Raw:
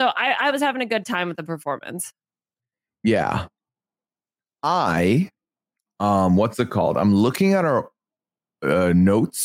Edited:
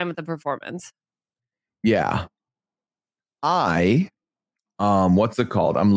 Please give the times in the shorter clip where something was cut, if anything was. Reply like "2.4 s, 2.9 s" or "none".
none

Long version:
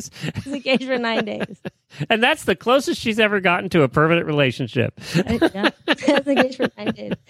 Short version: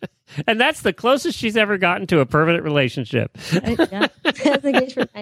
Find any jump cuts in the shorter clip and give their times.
none

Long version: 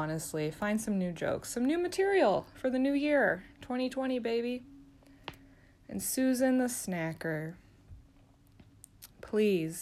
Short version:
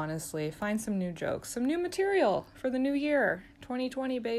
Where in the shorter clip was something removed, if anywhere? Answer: none

